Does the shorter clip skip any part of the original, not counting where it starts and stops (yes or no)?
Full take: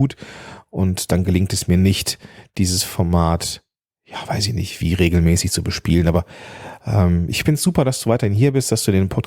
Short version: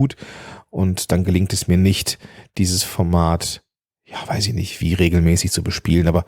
no